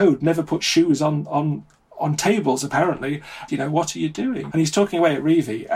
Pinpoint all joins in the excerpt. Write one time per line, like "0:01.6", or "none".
0:03.5
0:04.5